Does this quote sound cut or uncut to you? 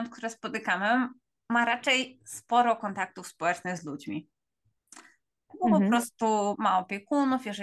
cut